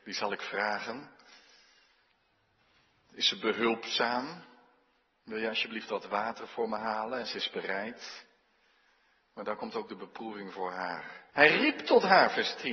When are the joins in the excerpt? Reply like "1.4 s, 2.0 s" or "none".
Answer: 11.3 s